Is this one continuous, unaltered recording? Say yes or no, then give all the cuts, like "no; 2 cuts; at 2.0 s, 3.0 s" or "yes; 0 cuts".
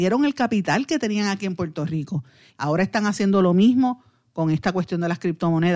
no; 1 cut; at 2.5 s